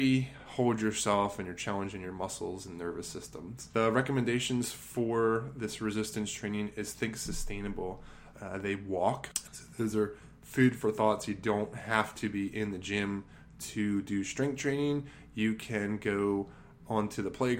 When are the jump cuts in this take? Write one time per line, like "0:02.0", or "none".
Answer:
0:08.3
0:09.5